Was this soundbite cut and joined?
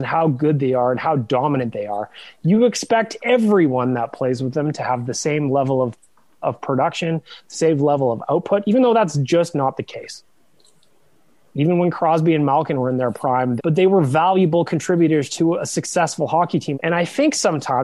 yes; 3 cuts; at 6.4 s, 13.6 s, 16.7 s

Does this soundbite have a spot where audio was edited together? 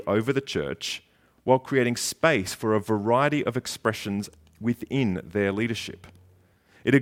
no; 0 cuts

